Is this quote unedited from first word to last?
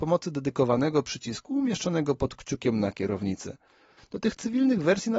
no; 1 cut; at 4.0 s

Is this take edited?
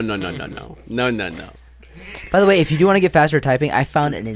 no; 0 cuts

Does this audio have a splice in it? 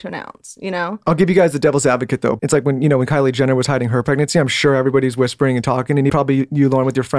yes; 2 cuts; at 2.4 s, 6.1 s

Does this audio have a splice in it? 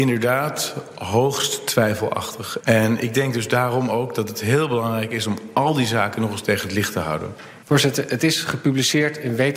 yes; 1 cut; at 2.6 s

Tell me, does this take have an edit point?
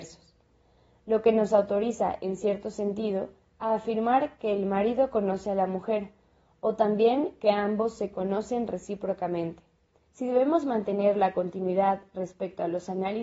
yes; 1 cut; at 10.0 s

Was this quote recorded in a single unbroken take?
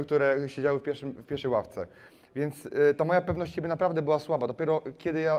yes; 0 cuts

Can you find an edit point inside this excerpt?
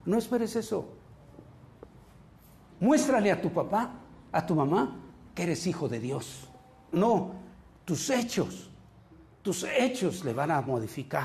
yes; 2 cuts; at 2.7 s, 6.9 s

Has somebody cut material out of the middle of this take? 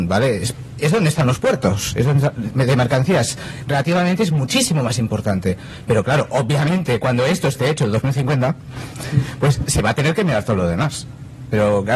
no; 0 cuts

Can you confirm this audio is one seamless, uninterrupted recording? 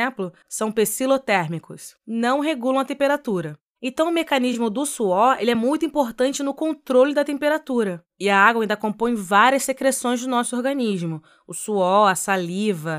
yes; 0 cuts

